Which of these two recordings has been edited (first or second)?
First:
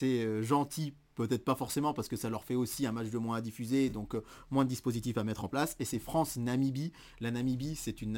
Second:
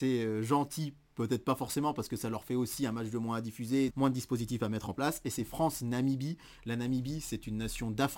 second